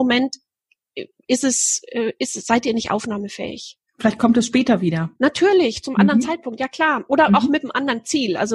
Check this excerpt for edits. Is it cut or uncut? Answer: cut